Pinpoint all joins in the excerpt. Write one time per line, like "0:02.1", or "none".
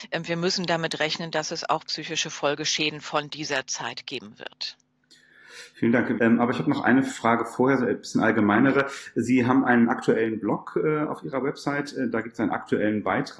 0:06.2